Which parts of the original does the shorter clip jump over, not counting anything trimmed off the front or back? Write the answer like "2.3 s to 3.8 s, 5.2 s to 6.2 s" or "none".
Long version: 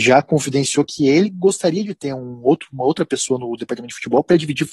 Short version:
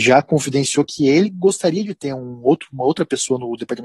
none